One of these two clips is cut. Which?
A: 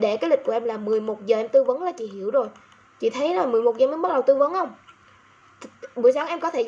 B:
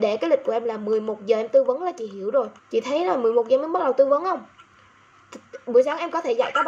B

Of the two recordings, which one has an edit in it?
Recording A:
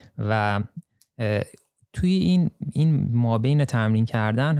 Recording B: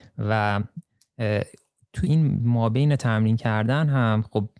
B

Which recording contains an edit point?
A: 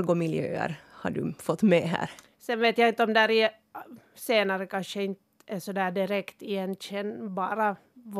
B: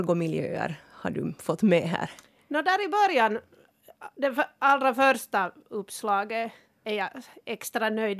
A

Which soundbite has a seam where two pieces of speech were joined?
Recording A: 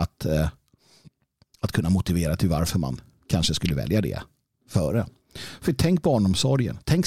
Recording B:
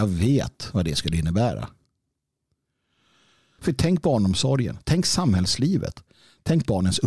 B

